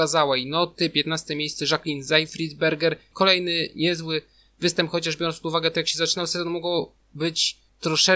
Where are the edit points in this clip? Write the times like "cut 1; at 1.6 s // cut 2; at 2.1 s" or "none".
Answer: cut 1; at 3.1 s